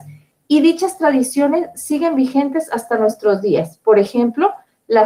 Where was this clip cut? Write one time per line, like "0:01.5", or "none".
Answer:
none